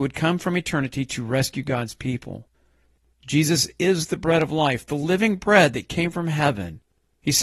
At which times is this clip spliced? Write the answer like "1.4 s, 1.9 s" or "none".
none